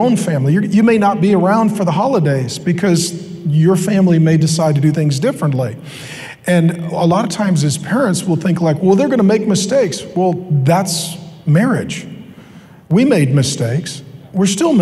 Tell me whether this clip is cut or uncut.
uncut